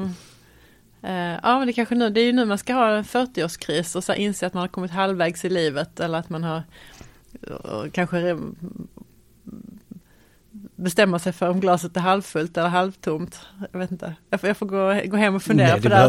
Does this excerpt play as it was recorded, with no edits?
yes; 0 cuts

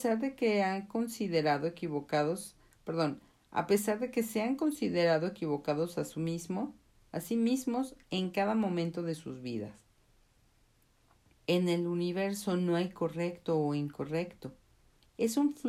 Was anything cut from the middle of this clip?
yes; 1 cut; at 11.4 s

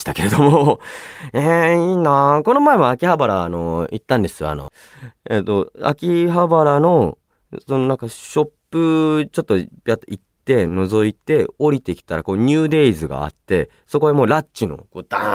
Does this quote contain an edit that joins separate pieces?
no; 0 cuts

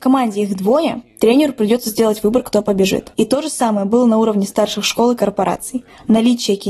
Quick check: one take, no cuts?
no; 1 cut; at 3.1 s

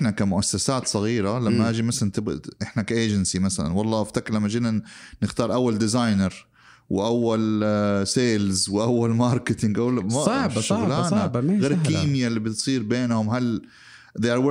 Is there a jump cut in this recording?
no; 0 cuts

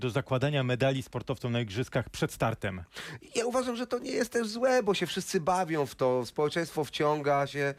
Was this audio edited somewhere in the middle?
no; 0 cuts

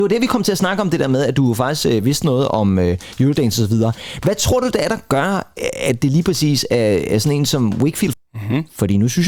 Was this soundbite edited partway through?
yes; 1 cut; at 8.1 s

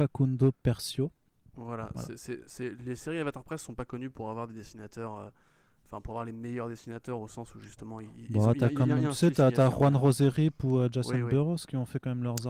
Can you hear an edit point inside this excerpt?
no; 0 cuts

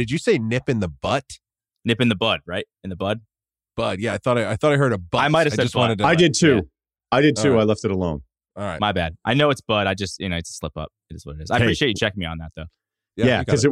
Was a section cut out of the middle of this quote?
no; 0 cuts

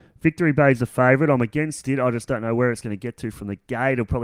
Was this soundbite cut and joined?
no; 0 cuts

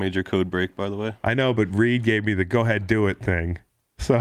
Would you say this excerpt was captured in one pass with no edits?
yes; 0 cuts

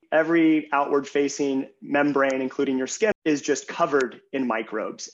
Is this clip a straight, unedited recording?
no; 1 cut; at 3.1 s

